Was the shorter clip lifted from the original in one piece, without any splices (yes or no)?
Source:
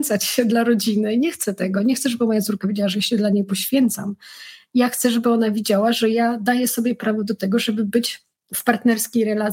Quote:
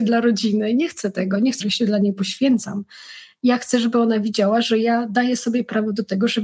no